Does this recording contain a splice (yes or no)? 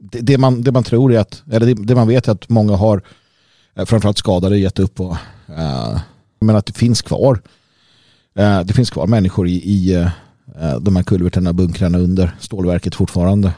yes